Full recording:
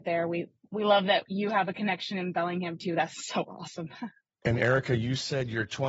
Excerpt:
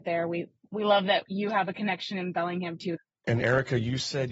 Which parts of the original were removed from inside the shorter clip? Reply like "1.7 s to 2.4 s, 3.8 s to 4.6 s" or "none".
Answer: 2.9 s to 4.1 s

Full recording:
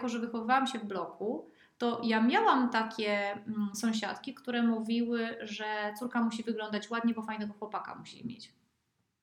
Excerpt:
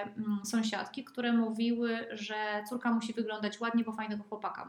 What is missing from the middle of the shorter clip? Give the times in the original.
none

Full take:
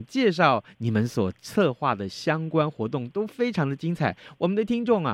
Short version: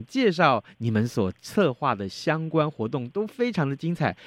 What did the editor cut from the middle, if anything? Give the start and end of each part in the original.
none

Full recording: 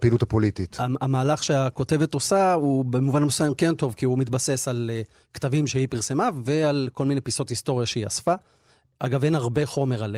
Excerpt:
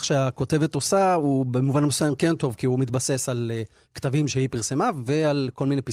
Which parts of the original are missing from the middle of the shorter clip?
none

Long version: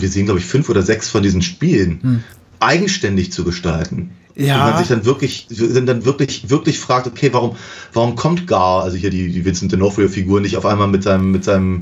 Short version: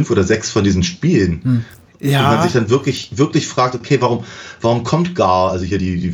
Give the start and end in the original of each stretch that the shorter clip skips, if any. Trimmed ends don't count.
2.5 s to 4.2 s, 5.5 s to 6.4 s

